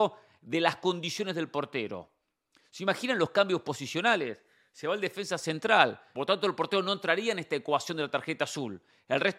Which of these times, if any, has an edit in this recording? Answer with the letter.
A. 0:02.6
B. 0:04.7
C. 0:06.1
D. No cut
C